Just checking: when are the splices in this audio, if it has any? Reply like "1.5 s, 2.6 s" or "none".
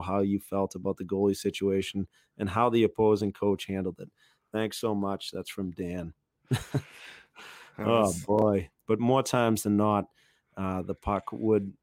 8.7 s

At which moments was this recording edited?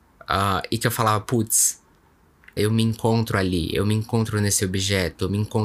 2.6 s

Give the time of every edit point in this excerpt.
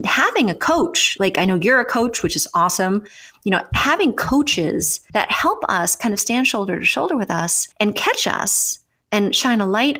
none

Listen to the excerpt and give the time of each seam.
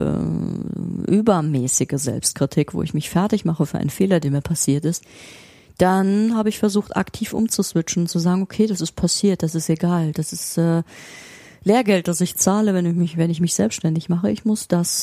none

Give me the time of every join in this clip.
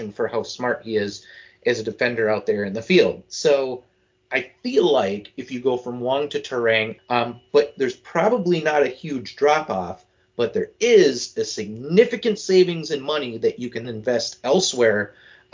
7.0 s, 13.8 s

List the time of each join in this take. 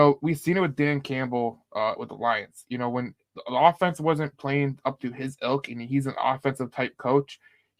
4.3 s

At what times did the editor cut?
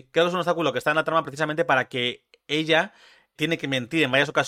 3.4 s

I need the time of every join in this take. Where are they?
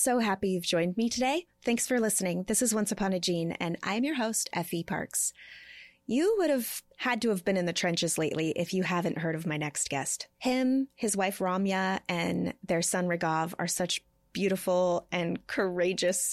6.9 s

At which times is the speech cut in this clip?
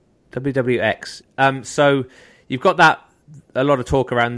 1.2 s

